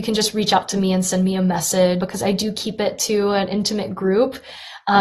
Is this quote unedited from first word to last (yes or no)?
no